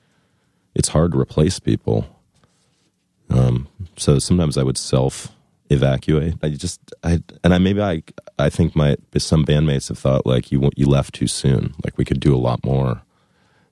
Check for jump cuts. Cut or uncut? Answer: cut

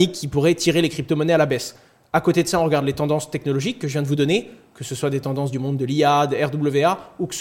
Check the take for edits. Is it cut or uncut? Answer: uncut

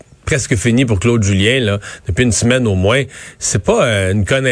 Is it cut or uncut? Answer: uncut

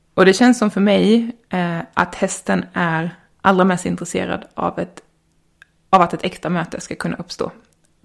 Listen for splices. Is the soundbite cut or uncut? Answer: uncut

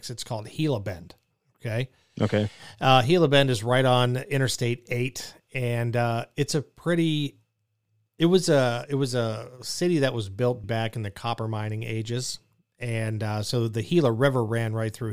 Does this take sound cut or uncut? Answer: cut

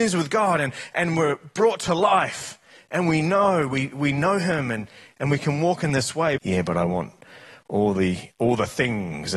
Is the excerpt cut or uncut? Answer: cut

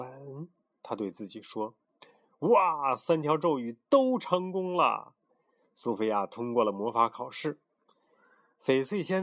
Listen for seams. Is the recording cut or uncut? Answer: cut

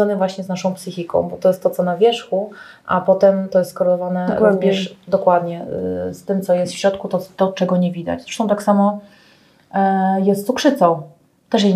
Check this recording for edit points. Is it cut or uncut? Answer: uncut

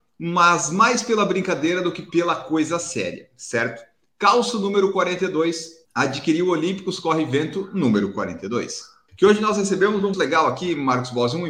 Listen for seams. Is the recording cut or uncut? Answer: cut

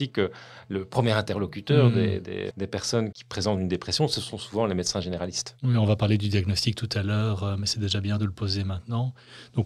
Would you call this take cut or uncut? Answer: cut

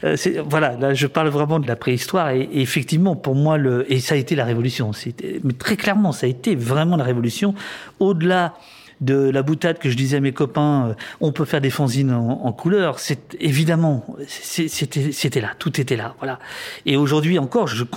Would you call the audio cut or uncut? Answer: uncut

